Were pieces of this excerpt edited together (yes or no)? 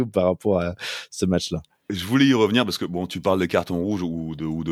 no